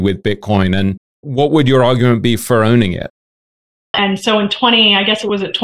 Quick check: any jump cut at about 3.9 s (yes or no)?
yes